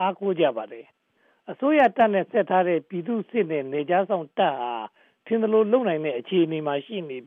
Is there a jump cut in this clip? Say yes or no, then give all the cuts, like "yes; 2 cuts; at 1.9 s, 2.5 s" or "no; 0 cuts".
no; 0 cuts